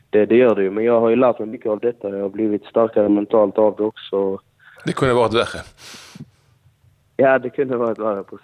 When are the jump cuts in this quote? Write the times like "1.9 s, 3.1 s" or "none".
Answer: 4.8 s